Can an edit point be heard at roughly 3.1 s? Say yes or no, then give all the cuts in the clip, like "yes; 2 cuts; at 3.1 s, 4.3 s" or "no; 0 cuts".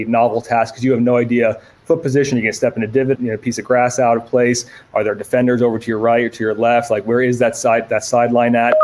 yes; 1 cut; at 3.1 s